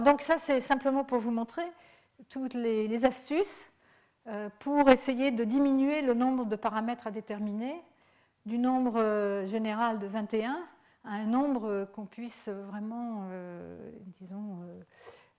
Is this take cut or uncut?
uncut